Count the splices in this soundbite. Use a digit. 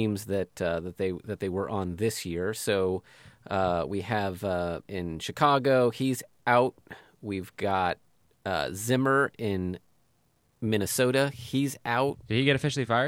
1